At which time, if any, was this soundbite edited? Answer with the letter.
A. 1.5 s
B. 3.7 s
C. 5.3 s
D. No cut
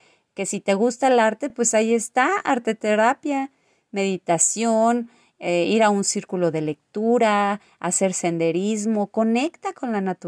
D